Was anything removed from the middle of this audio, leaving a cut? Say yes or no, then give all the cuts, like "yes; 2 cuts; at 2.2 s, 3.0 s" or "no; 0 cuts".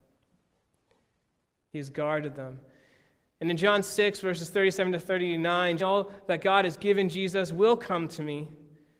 yes; 1 cut; at 5.8 s